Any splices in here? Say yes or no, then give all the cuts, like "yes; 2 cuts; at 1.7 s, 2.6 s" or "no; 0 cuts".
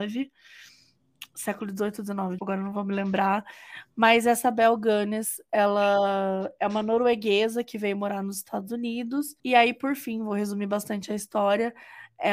yes; 2 cuts; at 2.4 s, 9.4 s